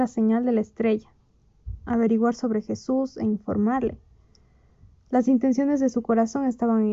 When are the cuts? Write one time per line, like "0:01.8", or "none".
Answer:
none

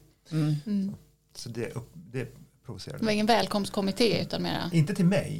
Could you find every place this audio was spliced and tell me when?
none

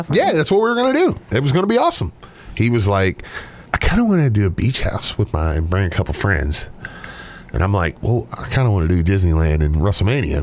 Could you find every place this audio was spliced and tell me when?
0:03.7

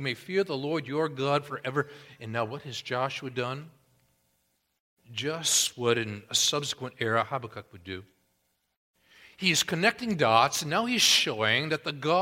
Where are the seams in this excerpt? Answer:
none

